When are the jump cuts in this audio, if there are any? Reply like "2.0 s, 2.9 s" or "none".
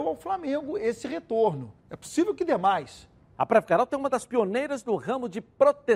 1.8 s, 3.4 s